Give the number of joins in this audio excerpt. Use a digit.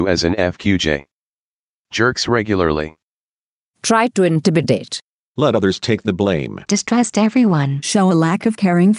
1